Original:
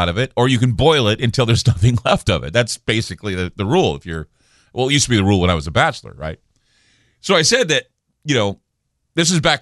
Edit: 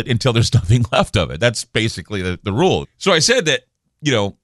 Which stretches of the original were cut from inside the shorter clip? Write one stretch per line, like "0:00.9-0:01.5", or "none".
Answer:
0:04.0-0:07.1